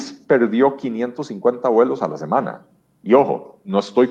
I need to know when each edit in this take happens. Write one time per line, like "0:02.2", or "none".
none